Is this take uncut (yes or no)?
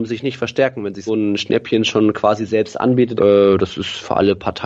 no